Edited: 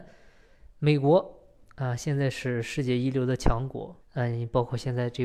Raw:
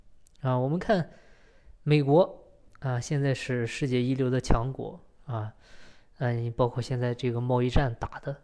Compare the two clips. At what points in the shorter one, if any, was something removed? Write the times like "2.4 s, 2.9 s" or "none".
4.0 s